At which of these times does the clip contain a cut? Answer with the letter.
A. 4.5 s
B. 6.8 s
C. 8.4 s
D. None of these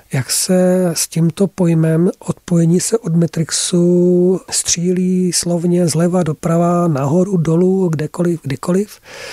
A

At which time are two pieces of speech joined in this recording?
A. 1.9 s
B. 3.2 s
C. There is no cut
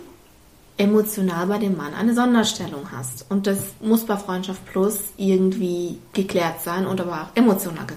C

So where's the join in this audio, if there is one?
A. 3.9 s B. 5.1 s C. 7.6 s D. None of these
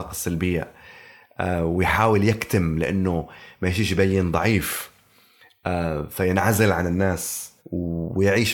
C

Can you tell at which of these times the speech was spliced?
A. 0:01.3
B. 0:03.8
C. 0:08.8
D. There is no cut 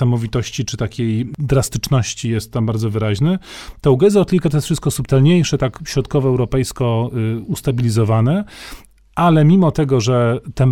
D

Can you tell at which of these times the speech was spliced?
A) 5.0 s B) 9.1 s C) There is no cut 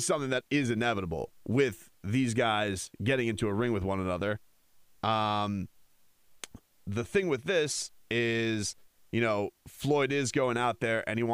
A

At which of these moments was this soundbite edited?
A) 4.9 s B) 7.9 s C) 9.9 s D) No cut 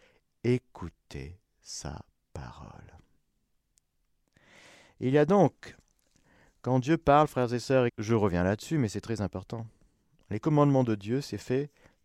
B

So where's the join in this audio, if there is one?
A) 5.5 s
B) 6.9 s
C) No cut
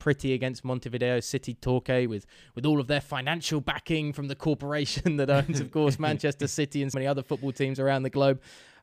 B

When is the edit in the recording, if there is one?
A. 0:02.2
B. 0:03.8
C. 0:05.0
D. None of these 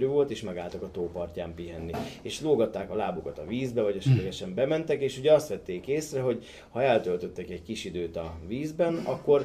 D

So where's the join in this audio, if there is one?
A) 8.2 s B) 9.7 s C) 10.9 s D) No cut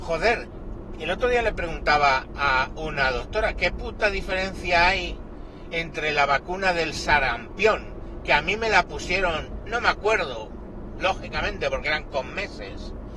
B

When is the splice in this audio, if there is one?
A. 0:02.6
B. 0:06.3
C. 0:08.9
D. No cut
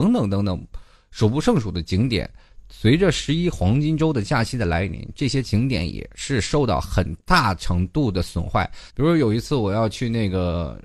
C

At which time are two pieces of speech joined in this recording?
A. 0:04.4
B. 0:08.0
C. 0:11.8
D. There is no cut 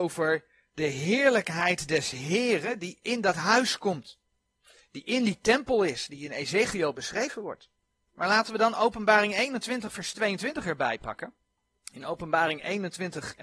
C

